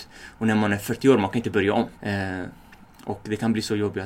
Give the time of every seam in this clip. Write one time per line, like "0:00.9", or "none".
0:01.9